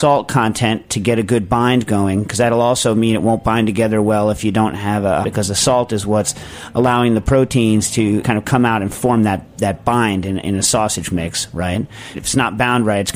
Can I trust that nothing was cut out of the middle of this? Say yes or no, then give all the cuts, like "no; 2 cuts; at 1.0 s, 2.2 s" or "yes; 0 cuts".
no; 3 cuts; at 5.2 s, 8.2 s, 12.1 s